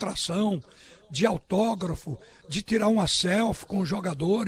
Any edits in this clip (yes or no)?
no